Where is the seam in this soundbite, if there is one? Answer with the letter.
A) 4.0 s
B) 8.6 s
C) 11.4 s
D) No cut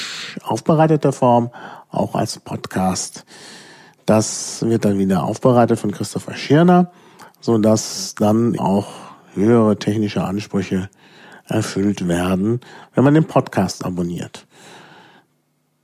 B